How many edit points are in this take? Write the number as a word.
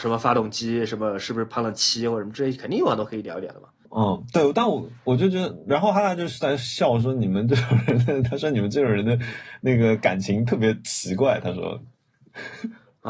one